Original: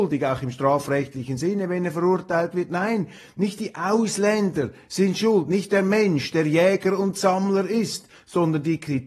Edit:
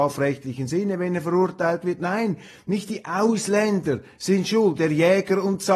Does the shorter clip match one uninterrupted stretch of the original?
no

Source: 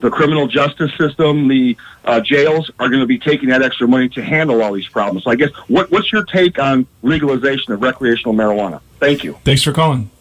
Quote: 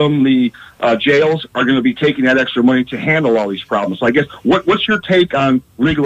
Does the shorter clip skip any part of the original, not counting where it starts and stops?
no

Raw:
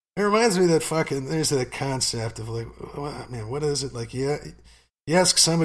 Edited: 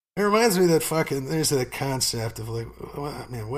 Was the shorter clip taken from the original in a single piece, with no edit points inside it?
yes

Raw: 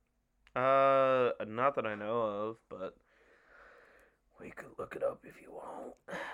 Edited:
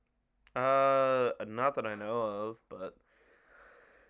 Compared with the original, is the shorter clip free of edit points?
yes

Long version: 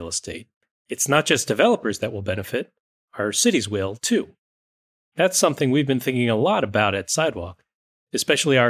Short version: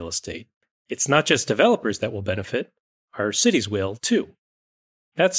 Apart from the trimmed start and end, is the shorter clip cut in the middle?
no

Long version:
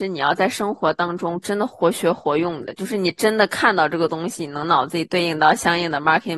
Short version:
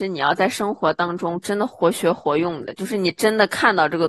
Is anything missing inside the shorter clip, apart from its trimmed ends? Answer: no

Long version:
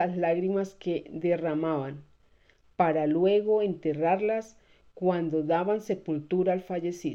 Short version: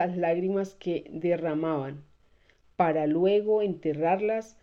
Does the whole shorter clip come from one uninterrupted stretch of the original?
yes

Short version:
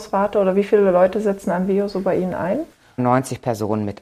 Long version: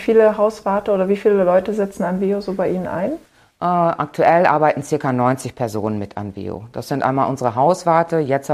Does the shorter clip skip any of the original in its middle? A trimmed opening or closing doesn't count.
yes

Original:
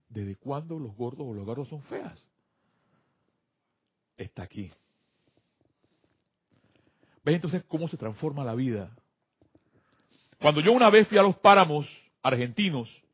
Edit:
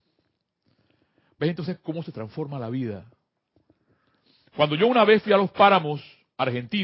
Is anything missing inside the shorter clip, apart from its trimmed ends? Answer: no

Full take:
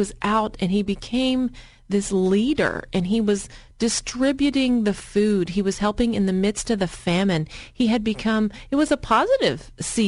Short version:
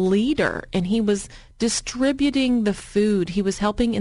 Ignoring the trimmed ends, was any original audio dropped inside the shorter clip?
no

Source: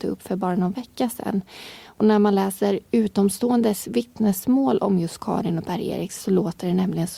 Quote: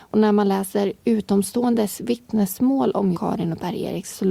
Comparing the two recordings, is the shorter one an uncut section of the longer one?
no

